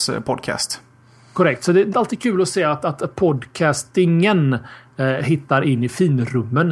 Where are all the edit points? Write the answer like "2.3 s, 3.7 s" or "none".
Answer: 1.9 s